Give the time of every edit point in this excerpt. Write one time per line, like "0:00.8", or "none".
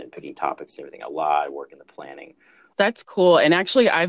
0:02.7